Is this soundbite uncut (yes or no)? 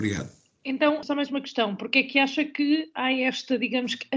no